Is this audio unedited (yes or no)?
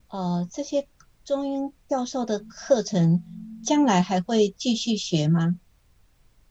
yes